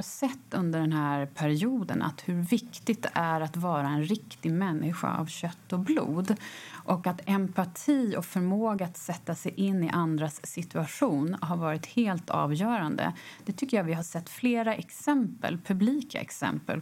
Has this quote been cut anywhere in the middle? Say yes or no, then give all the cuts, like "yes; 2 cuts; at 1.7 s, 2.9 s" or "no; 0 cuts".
no; 0 cuts